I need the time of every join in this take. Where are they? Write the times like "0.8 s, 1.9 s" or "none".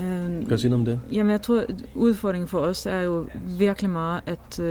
none